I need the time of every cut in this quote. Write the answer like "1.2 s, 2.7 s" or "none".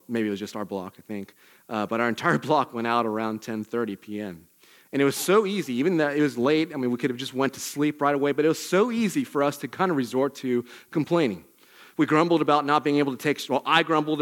none